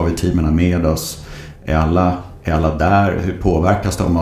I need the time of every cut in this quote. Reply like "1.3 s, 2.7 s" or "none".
none